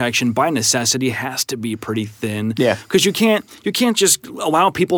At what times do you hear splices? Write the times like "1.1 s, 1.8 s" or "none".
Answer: none

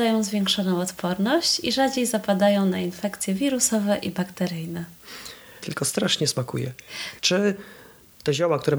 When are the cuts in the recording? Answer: 5.6 s, 7.2 s

